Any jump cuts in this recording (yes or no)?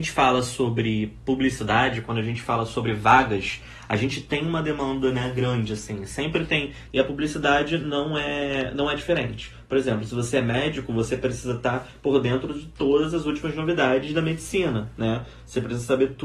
yes